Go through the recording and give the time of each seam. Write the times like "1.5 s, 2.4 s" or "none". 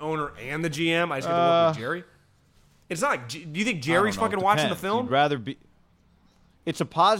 none